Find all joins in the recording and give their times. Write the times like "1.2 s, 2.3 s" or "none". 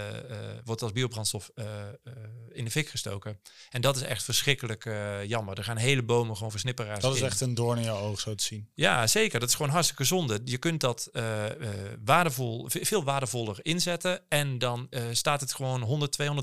none